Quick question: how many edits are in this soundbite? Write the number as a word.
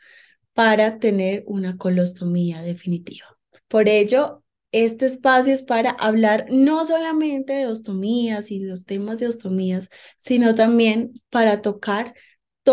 one